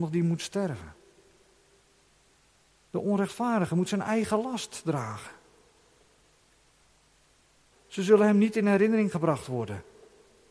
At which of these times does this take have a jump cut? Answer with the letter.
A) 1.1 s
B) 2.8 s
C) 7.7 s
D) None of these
C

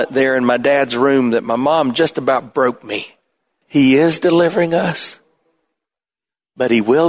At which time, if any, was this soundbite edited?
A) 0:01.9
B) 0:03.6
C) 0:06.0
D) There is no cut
B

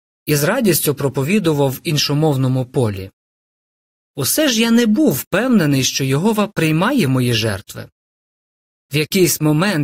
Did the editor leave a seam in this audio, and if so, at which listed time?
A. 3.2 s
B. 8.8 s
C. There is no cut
C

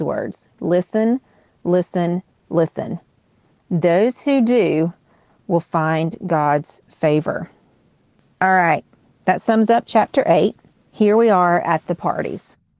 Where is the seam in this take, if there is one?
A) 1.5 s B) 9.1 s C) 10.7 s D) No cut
C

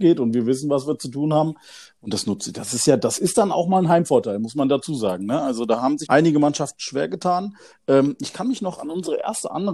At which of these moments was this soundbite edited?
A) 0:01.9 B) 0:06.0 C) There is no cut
B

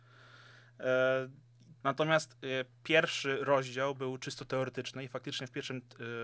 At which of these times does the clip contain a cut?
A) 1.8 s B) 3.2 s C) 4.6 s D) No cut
A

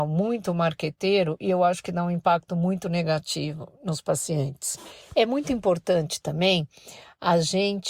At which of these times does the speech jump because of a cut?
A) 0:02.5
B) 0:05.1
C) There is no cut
C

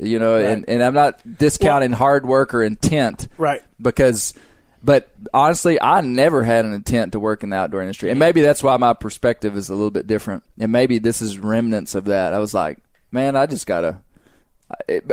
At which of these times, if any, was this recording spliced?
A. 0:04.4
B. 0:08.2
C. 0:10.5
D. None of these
C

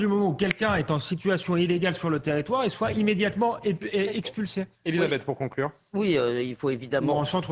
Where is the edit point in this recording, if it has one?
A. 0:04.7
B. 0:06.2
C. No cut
A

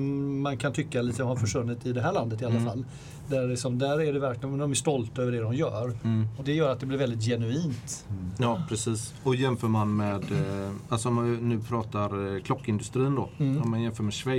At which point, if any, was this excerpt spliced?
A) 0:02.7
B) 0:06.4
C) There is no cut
B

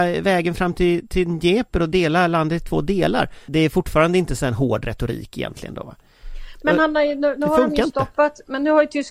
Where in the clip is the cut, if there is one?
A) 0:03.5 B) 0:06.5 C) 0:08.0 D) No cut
A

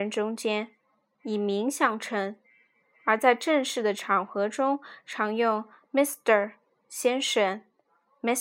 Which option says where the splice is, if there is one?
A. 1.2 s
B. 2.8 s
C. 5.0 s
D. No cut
D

